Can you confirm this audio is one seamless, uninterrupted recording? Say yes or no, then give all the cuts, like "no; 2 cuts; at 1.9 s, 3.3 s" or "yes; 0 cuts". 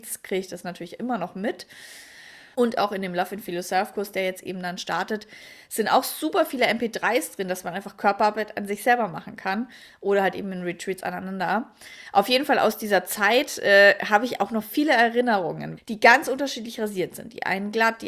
no; 2 cuts; at 2.5 s, 15.8 s